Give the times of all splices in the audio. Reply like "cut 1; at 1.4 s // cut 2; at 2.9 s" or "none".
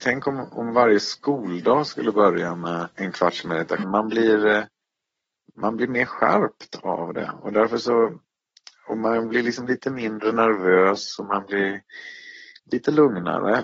cut 1; at 3.8 s